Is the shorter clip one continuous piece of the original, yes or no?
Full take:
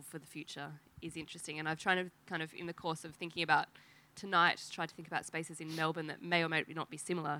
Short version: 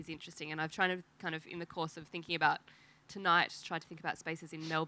yes